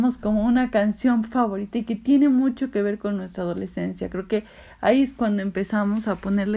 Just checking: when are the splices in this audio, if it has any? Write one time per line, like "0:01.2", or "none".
none